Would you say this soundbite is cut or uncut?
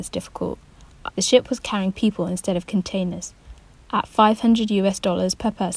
cut